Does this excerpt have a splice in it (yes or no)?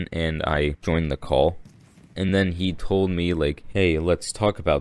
no